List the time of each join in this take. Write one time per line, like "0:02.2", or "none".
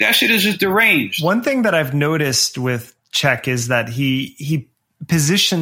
none